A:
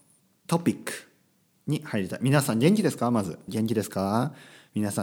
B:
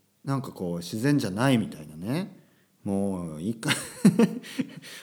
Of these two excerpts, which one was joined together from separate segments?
A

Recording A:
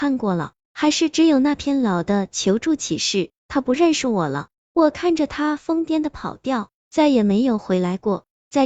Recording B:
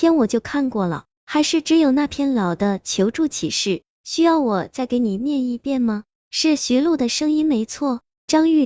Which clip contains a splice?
A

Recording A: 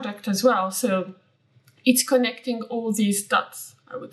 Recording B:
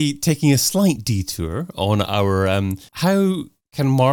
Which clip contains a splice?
B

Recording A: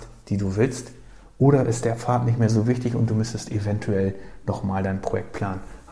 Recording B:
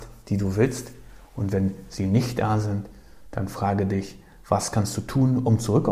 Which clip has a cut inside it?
A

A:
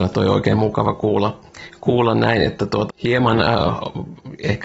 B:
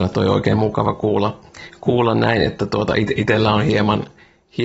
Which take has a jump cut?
A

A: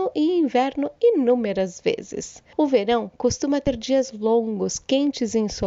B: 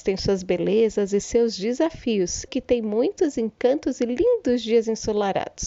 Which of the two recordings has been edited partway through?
B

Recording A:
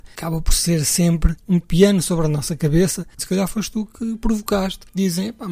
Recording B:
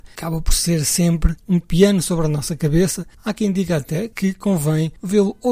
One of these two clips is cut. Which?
A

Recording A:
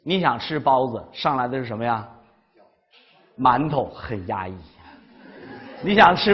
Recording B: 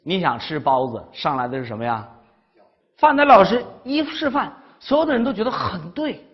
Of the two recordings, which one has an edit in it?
B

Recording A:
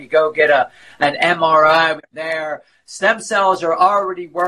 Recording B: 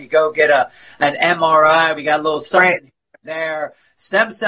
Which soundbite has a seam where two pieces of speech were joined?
A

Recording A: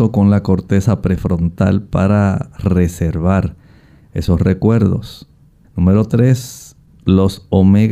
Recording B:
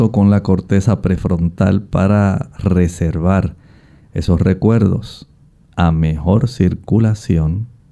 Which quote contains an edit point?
A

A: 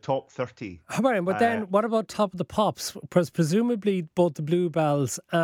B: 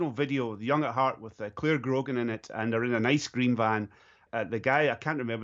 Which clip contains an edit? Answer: B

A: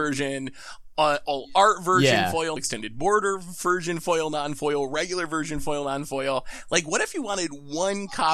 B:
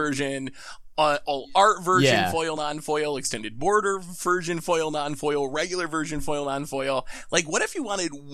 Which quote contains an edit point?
A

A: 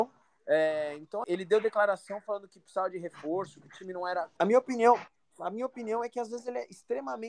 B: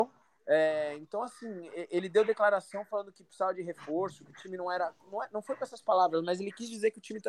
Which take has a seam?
A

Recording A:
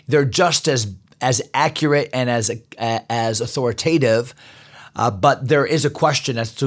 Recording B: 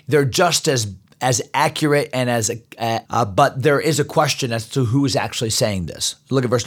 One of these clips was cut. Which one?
B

